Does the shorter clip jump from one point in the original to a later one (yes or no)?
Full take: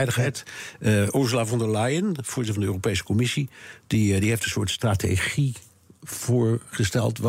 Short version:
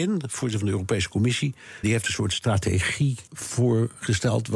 yes